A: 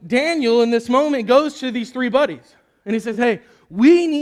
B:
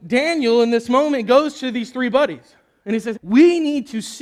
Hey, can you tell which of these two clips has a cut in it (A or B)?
B